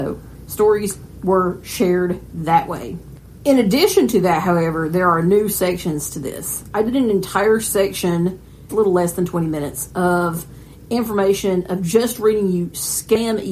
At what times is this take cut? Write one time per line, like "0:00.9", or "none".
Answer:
0:08.7